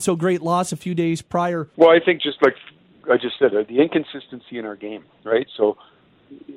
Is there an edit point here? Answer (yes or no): yes